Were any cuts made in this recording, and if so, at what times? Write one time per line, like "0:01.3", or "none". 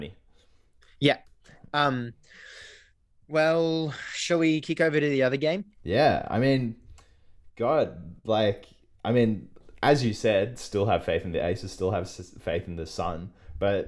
none